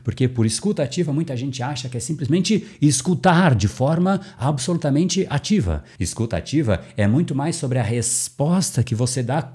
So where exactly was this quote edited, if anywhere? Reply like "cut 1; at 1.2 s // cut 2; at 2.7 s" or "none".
cut 1; at 6.0 s